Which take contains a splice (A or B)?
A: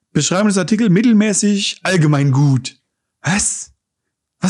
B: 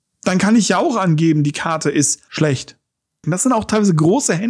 B